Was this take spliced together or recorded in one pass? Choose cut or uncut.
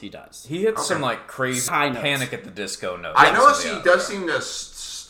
cut